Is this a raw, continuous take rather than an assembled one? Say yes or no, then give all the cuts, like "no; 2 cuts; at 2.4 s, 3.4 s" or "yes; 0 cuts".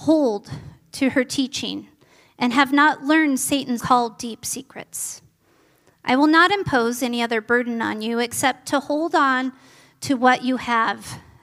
no; 1 cut; at 3.8 s